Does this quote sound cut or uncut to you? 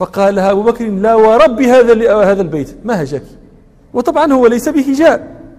uncut